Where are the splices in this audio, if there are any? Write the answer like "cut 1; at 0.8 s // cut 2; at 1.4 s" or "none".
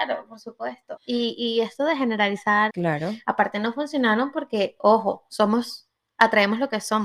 cut 1; at 1.0 s // cut 2; at 2.7 s